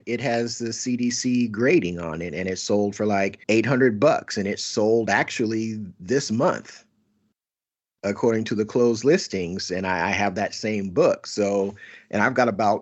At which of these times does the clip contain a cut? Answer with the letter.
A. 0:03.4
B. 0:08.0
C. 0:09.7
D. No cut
A